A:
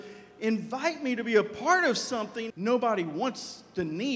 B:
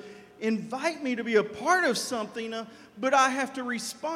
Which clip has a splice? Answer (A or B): A